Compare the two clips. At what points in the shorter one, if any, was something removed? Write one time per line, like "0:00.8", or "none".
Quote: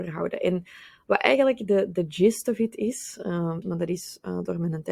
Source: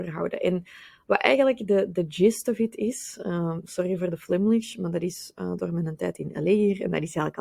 0:03.6